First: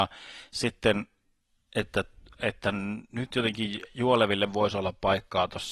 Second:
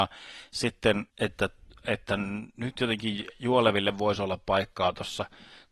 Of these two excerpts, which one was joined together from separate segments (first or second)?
second